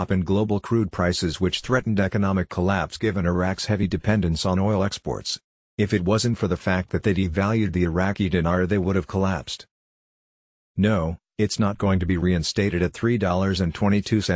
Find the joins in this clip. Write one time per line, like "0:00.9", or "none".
none